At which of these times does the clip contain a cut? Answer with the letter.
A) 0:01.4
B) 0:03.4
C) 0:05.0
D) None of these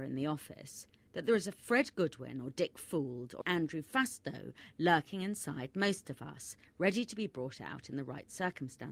B